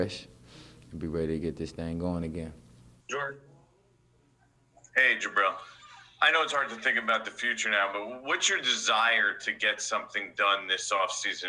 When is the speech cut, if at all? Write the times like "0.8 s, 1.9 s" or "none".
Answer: 3.0 s